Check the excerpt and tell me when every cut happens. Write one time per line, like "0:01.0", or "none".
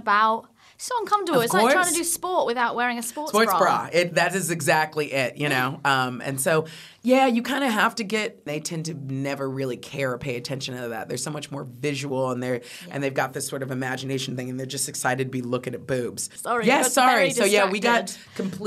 0:08.5
0:16.4